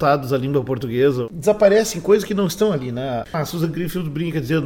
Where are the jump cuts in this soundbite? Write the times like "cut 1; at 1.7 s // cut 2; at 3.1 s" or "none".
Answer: cut 1; at 3.2 s